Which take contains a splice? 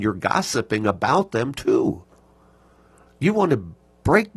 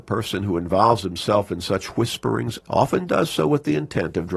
second; 1 cut; at 2.6 s

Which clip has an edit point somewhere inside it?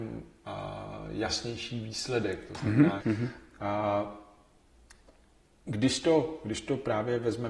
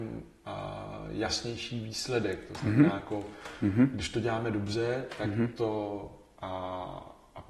first; 1 cut; at 3.0 s

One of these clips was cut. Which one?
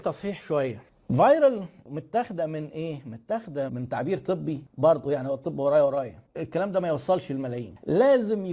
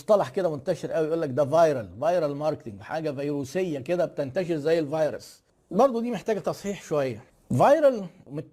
first; 2 cuts; at 3.7 s, 6.3 s

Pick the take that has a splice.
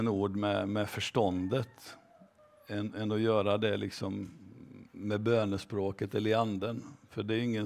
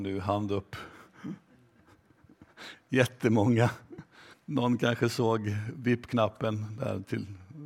second; 1 cut; at 4.3 s

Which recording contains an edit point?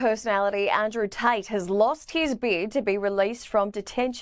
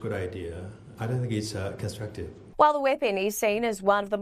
second; 1 cut; at 2.5 s

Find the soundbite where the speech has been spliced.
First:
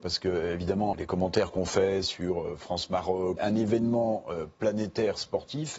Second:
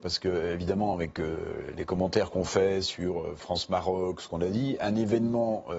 first; 2 cuts; at 0.9 s, 3.4 s

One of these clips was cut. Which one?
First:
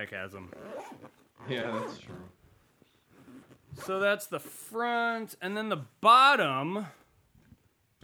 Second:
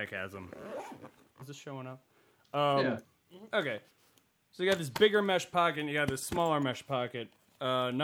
second; 1 cut; at 1.4 s

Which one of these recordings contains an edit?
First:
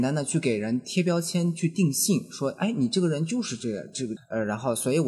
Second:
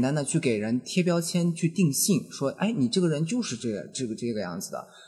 first; 1 cut; at 4.2 s

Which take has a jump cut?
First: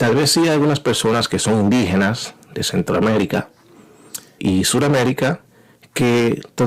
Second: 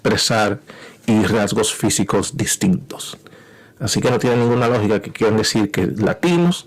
first; 1 cut; at 4.4 s

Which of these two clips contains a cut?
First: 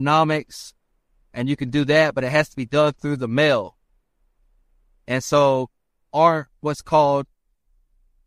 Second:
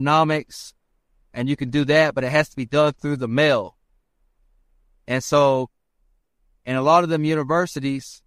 first; 1 cut; at 6.0 s

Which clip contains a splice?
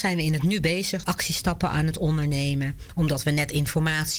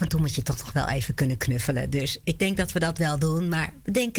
first; 1 cut; at 1.0 s

